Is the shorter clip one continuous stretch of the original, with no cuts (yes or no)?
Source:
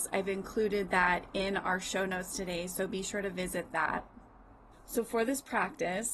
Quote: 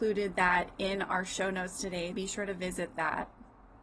no